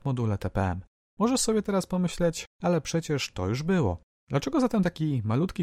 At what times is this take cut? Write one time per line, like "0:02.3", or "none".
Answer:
0:02.5
0:04.2